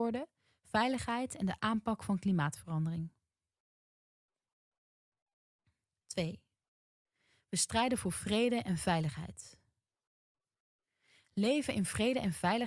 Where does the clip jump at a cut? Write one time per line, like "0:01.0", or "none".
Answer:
none